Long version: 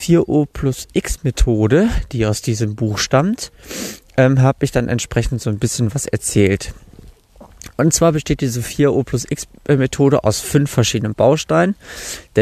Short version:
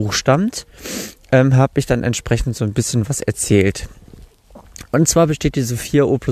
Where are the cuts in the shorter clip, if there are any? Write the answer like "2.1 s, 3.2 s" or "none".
none